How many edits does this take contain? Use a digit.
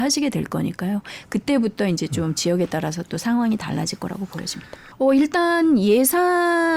1